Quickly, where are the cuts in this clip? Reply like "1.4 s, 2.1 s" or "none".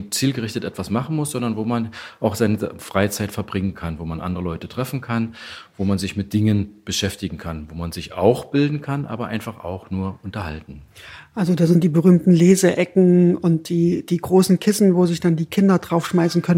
none